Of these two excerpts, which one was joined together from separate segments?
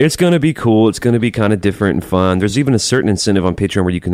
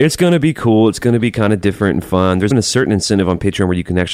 second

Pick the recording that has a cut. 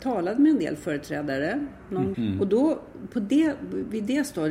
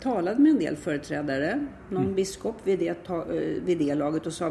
first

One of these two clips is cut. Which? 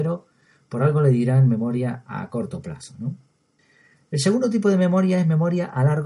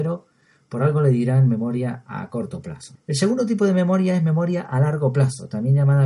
second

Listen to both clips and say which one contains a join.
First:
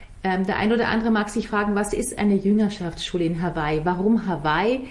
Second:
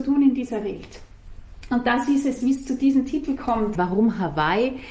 second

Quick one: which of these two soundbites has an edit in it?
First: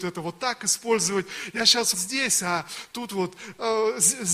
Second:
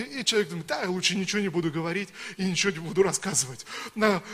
first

